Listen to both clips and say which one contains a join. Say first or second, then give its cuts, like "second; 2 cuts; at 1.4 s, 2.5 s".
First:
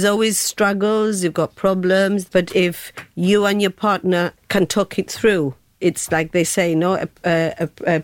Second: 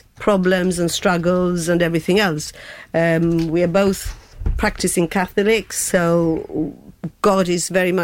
first; 2 cuts; at 2.3 s, 4.4 s